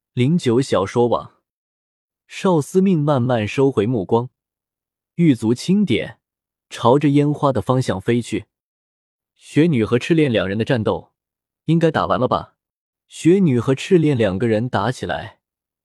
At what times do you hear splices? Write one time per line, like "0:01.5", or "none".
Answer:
0:12.9